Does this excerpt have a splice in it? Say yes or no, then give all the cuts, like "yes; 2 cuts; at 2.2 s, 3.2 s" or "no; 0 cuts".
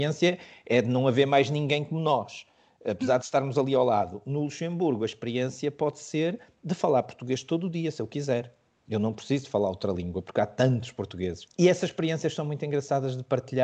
no; 0 cuts